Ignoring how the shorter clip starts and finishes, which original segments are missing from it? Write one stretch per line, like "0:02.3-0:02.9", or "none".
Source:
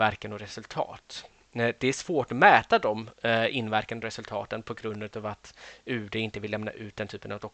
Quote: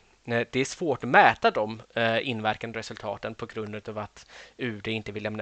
none